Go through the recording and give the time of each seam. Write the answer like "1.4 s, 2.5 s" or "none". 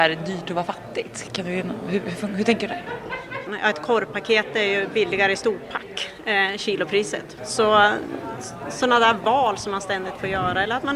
3.5 s, 7.4 s